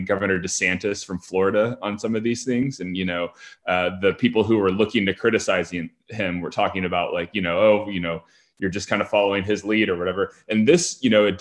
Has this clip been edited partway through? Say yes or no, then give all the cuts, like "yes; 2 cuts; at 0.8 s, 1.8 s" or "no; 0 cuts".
no; 0 cuts